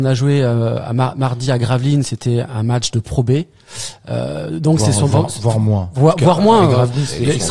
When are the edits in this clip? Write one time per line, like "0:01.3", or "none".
none